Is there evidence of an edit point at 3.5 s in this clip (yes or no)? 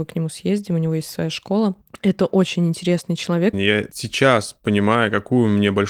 yes